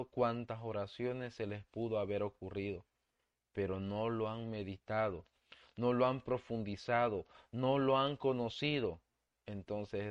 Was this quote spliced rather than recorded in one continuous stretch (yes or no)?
no